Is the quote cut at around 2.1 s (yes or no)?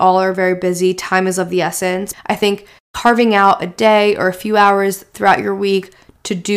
yes